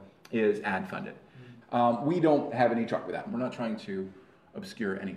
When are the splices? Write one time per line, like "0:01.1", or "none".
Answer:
0:01.6
0:03.3